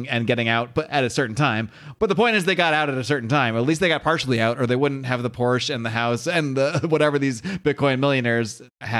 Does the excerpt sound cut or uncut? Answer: uncut